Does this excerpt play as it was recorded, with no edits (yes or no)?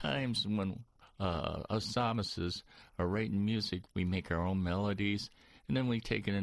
no